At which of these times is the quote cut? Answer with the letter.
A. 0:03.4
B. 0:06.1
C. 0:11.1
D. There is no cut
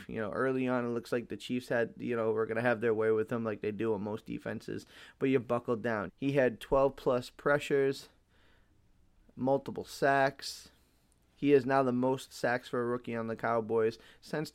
B